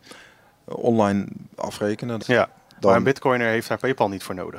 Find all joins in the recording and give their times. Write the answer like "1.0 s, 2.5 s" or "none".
2.2 s